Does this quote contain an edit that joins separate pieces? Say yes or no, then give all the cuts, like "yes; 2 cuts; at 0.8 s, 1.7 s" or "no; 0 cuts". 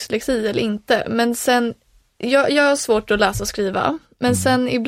no; 0 cuts